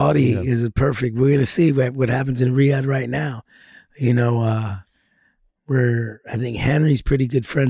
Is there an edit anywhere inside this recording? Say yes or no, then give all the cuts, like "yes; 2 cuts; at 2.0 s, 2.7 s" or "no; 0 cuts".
no; 0 cuts